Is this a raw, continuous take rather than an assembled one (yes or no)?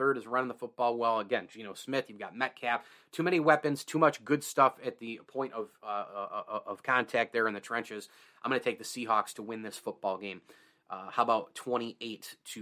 yes